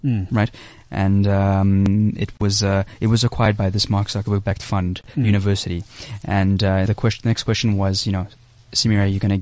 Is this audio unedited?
no; 1 cut; at 6.9 s

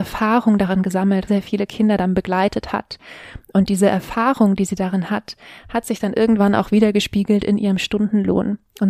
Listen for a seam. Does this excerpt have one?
yes; 1 cut; at 1.3 s

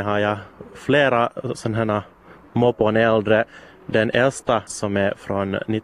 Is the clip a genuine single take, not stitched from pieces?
no; 1 cut; at 4.7 s

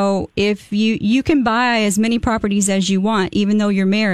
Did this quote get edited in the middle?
no; 0 cuts

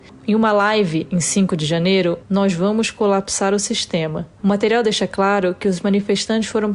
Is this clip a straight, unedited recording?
no; 2 cuts; at 2.2 s, 4.4 s

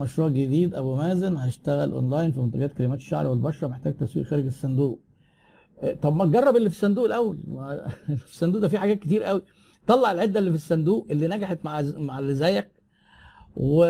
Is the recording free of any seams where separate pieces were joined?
yes; 0 cuts

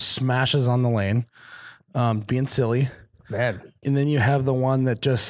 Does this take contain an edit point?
yes; 1 cut; at 3.8 s

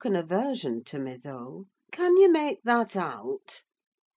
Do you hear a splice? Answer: yes; 1 cut; at 1.9 s

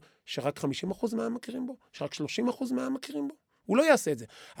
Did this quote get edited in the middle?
no; 0 cuts

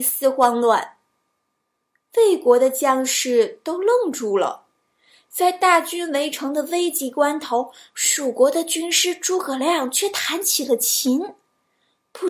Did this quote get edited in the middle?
no; 0 cuts

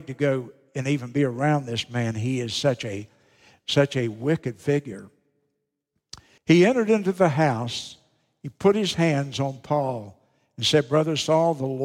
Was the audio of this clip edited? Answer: yes; 1 cut; at 6.4 s

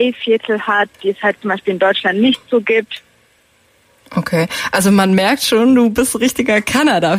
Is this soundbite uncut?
no; 1 cut; at 4.0 s

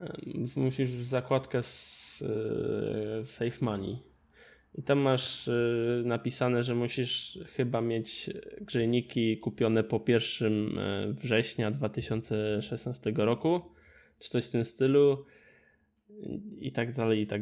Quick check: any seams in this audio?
no; 0 cuts

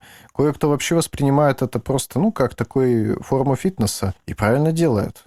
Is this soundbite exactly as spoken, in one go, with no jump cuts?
yes; 0 cuts

